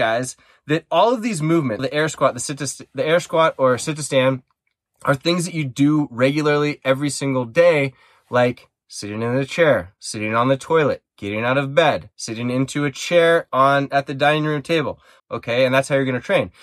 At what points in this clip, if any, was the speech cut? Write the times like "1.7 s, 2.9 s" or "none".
1.8 s, 12.1 s, 15.2 s